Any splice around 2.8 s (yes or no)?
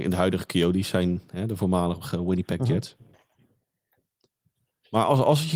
no